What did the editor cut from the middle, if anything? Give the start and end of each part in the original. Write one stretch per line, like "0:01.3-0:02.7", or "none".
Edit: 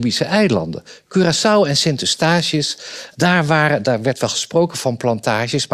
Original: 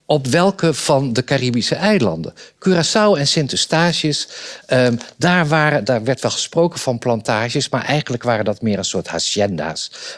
0:04.7-0:05.2